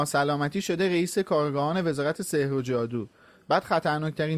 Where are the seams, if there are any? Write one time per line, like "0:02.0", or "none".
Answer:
none